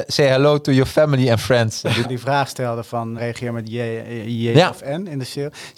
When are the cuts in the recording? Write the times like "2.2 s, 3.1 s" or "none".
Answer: 2.0 s, 3.2 s